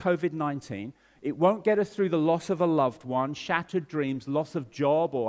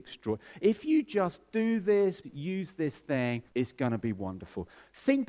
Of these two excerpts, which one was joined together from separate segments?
second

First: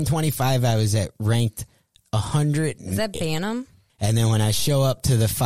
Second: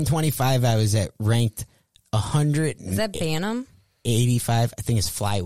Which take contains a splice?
first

